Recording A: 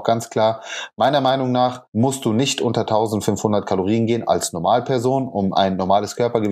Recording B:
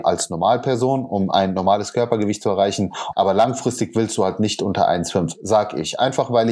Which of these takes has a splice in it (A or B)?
B